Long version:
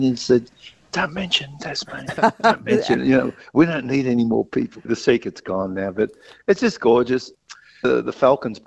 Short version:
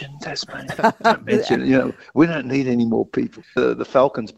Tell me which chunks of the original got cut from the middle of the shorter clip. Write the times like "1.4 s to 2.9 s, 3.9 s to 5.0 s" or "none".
4.8 s to 7.7 s